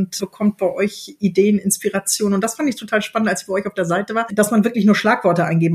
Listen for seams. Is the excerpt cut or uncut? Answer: uncut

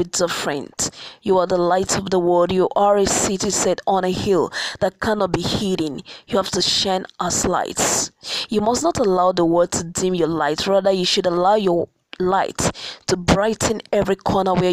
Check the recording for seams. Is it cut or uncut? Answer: uncut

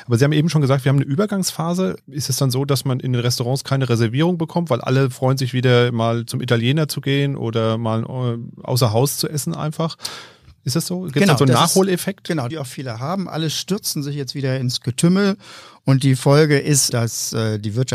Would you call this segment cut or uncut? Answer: cut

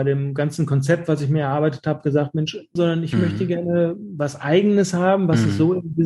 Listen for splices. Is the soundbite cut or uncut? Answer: cut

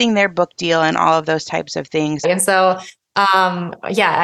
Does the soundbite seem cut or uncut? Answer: cut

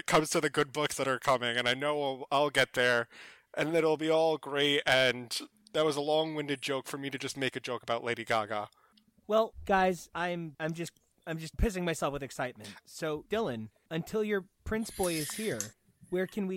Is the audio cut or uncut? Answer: uncut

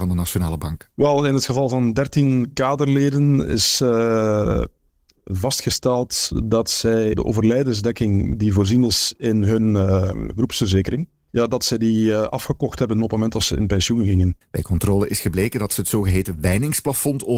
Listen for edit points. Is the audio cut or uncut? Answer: cut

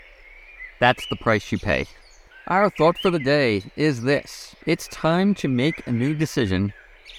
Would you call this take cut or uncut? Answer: cut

